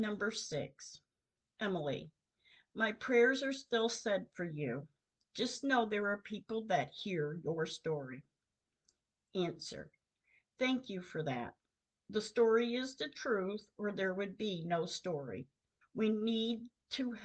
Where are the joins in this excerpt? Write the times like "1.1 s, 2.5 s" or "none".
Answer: 15.8 s